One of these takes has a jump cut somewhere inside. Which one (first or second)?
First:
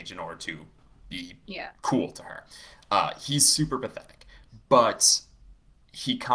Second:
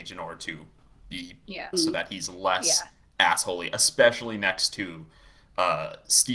second